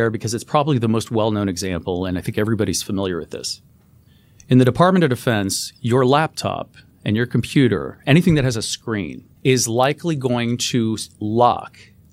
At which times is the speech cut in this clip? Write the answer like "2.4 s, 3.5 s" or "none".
9.4 s